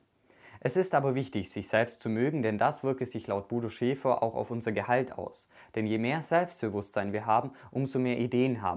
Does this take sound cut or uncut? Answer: uncut